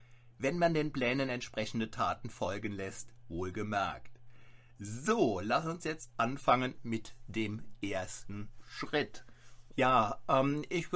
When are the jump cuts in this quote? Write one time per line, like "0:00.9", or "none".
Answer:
0:09.7